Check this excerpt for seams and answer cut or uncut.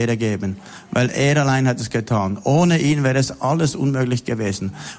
uncut